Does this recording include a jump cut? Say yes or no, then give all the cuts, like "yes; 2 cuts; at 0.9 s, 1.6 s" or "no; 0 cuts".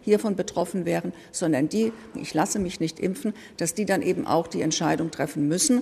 yes; 1 cut; at 2.1 s